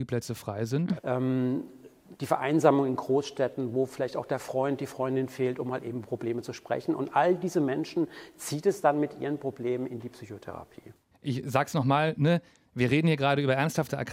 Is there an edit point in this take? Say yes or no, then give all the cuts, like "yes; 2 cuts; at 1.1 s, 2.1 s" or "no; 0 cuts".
yes; 2 cuts; at 1.0 s, 11.1 s